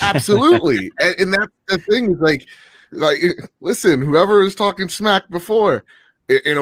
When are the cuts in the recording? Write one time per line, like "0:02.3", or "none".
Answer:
none